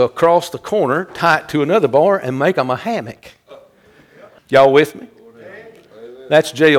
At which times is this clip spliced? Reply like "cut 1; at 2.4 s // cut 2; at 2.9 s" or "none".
cut 1; at 4.4 s